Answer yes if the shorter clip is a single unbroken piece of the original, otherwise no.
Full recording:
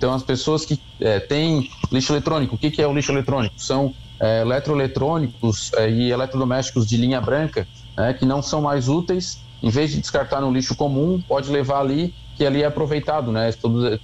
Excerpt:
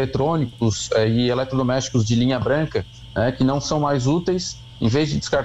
yes